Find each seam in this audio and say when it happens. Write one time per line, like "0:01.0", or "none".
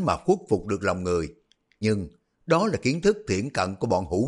0:01.8